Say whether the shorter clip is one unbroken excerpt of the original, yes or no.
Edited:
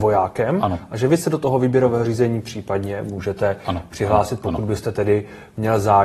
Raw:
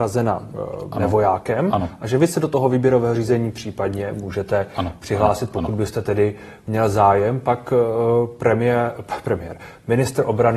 yes